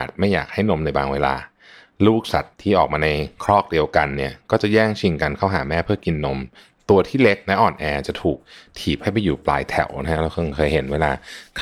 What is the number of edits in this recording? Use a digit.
0